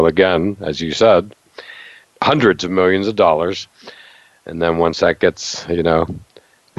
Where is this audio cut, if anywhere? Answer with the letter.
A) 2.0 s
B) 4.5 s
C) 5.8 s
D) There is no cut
A